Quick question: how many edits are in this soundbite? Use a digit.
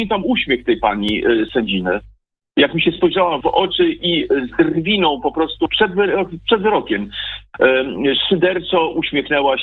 1